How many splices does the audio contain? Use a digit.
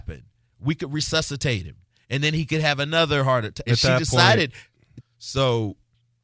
2